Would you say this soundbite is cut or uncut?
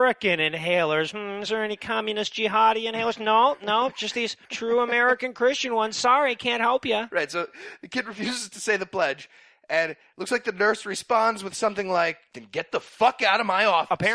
cut